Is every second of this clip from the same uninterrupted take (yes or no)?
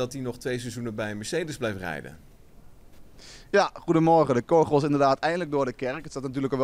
yes